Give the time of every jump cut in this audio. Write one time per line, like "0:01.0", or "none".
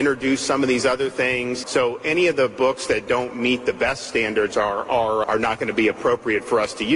0:01.6
0:05.2